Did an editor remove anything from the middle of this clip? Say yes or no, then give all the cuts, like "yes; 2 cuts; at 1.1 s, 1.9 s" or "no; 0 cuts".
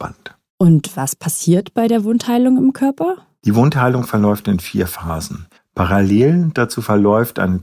yes; 1 cut; at 5.6 s